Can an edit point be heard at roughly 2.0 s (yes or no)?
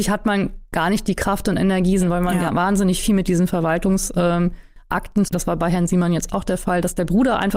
yes